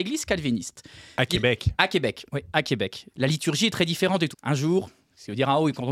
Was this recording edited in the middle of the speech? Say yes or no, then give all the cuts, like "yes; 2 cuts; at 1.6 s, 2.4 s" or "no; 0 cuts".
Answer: yes; 2 cuts; at 3.1 s, 4.3 s